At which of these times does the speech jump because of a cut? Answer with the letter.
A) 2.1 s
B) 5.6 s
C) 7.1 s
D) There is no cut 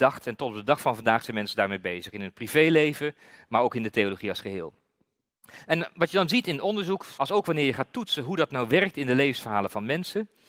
C